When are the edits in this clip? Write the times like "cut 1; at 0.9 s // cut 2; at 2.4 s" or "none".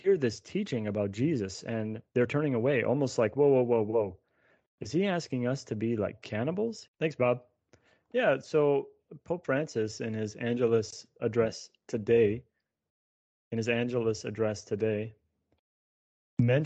cut 1; at 6.9 s // cut 2; at 11.2 s